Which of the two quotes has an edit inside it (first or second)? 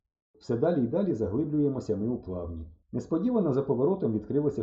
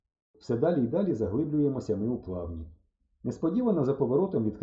first